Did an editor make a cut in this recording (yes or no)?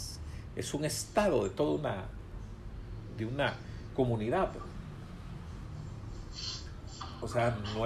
no